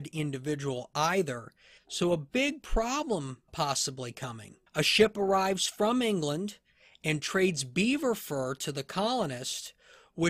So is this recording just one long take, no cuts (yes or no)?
no